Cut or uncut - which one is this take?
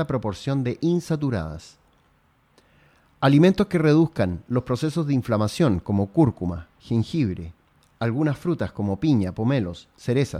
uncut